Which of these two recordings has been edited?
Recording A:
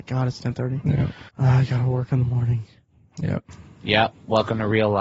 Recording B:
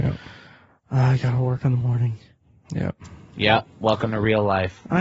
A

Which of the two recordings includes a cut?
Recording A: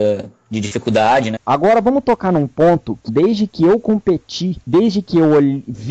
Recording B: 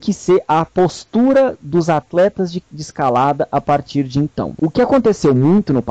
A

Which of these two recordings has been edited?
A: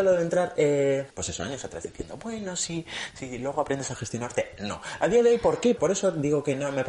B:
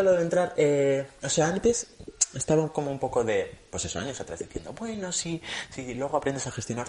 A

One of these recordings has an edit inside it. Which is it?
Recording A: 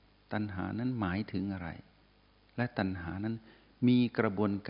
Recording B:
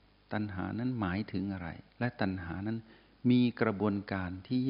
B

